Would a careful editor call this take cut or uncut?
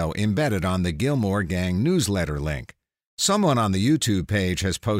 uncut